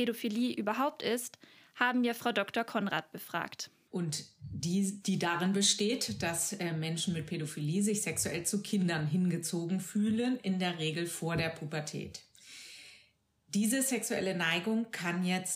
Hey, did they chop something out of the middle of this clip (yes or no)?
yes